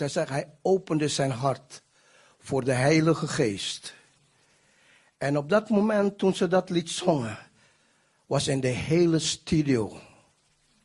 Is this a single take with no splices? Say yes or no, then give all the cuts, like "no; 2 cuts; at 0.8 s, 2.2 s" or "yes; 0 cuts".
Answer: yes; 0 cuts